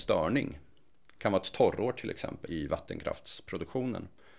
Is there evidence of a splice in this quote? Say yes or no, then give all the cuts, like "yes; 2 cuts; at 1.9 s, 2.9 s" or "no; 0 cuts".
yes; 1 cut; at 2.5 s